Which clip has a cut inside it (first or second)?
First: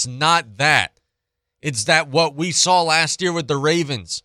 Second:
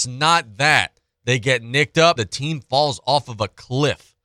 second